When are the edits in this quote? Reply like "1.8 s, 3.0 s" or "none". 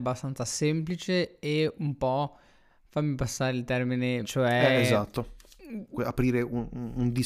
4.2 s, 5.9 s